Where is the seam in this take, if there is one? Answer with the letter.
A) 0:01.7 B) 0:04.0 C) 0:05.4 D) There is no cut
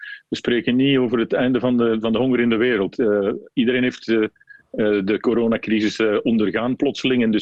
D